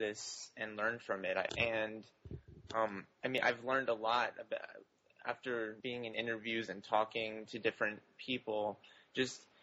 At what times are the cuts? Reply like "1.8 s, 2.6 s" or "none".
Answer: 1.5 s, 5.8 s